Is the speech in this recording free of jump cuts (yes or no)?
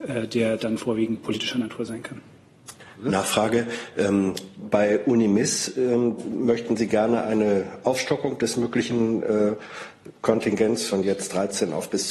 yes